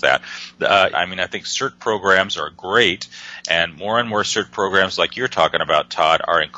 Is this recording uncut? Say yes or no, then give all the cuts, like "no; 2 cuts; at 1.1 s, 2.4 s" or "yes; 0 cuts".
no; 1 cut; at 0.9 s